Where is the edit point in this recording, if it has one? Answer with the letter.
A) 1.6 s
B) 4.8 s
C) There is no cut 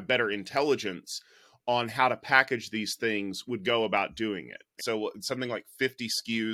B